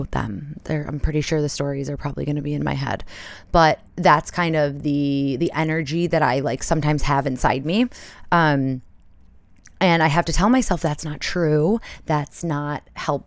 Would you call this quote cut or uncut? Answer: cut